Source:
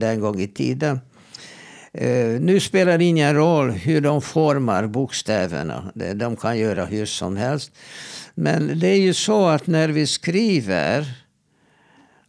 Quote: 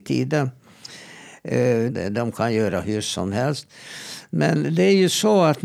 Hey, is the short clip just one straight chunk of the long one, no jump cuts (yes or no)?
no